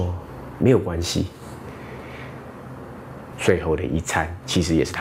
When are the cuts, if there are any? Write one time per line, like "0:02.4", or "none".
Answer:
0:03.3

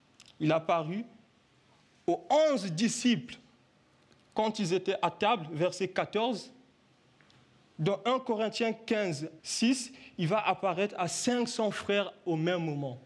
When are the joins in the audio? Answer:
0:09.4

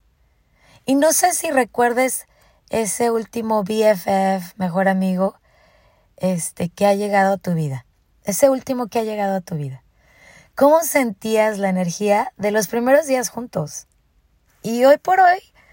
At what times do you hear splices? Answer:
0:14.5

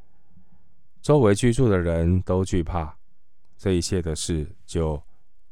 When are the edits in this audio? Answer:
none

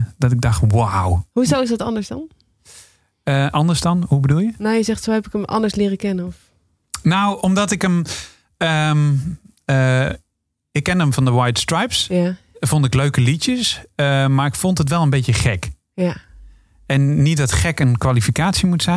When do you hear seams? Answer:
none

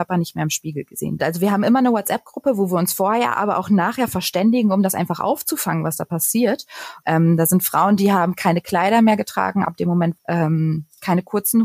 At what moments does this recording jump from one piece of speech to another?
0:01.2
0:07.0
0:10.2

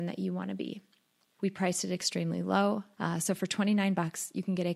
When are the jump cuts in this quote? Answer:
0:01.4
0:02.9

